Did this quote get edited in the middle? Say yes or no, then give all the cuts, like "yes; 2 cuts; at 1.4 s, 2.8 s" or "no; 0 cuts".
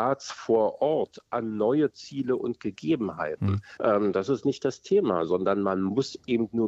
yes; 1 cut; at 3.8 s